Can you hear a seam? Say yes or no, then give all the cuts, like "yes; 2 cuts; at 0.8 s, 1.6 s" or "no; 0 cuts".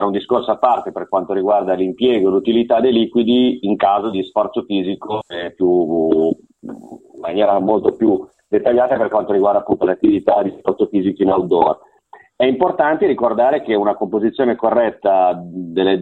no; 0 cuts